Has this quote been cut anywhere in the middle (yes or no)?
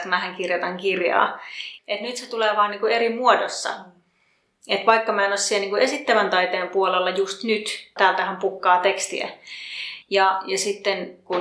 yes